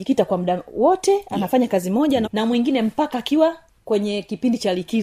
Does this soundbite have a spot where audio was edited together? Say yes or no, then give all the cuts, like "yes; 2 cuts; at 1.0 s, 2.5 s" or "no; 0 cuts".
yes; 1 cut; at 2.2 s